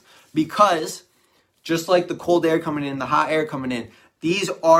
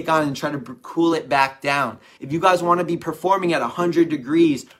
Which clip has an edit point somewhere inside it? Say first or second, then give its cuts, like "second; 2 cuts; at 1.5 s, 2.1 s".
second; 1 cut; at 2.2 s